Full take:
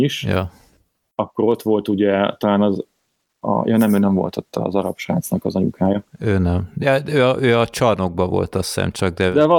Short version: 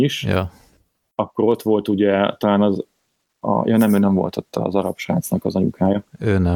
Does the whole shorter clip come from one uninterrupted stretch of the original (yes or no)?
yes